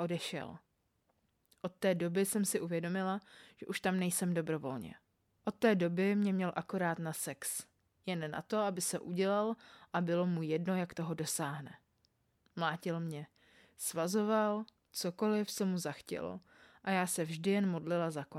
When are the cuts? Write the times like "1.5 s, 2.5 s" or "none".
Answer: 5.4 s